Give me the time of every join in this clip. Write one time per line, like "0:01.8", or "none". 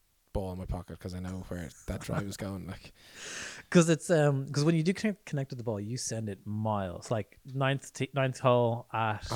none